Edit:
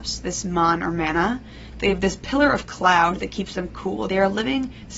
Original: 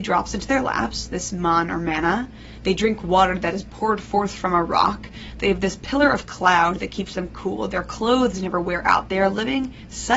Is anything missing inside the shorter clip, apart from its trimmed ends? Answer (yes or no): yes